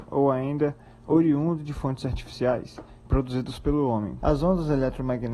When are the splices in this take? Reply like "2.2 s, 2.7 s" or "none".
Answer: 3.0 s, 4.2 s

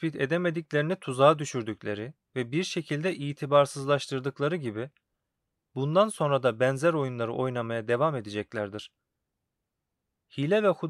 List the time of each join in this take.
none

